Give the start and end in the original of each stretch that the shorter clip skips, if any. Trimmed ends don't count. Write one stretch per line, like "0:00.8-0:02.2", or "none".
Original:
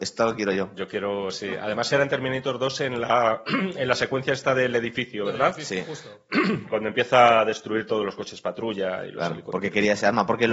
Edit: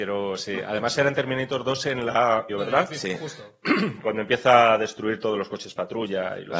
0:03.4-0:05.2